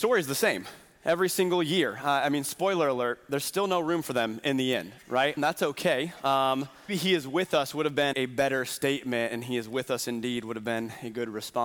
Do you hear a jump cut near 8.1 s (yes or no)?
yes